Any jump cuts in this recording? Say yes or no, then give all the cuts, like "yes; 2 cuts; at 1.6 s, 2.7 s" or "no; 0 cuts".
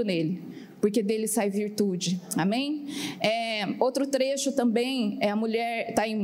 no; 0 cuts